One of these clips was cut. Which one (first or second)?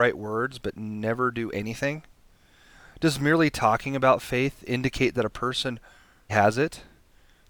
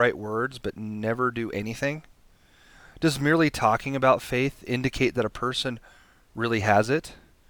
first